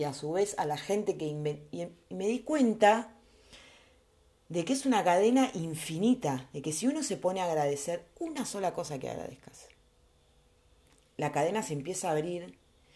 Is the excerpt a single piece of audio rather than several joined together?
yes; 0 cuts

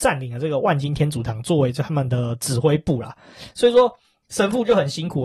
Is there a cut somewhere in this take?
no; 0 cuts

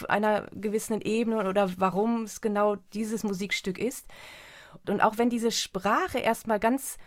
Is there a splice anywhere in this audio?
yes; 1 cut; at 4.8 s

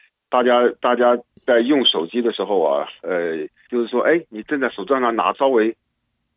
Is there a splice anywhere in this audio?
yes; 2 cuts; at 3.7 s, 5.3 s

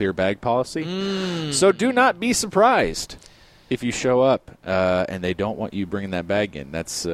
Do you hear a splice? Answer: no; 0 cuts

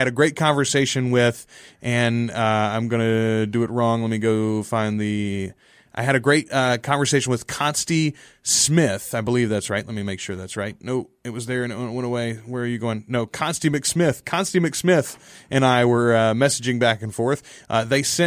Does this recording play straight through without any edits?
yes; 0 cuts

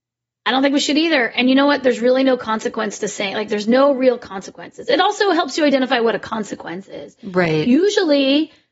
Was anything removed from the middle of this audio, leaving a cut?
no; 0 cuts

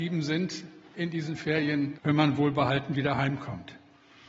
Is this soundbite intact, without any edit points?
no; 1 cut; at 1.9 s

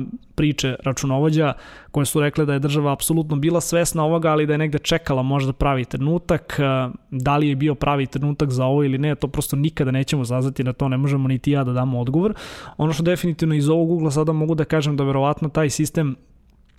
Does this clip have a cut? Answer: no; 0 cuts

